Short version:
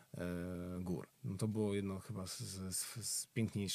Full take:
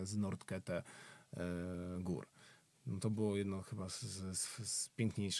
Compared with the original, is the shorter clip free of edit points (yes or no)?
no